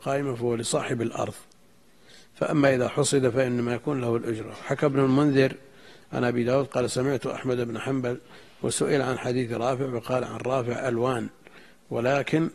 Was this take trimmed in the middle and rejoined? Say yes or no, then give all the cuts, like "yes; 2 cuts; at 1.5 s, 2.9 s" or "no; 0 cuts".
no; 0 cuts